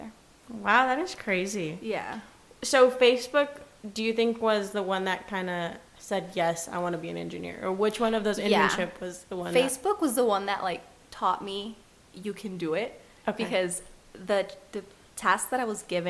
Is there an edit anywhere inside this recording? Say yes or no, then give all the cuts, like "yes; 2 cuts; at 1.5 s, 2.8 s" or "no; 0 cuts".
no; 0 cuts